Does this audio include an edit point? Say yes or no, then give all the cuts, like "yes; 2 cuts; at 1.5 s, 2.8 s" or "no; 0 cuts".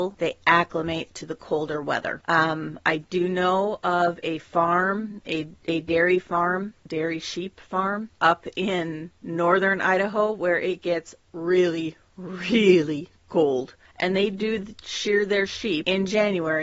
no; 0 cuts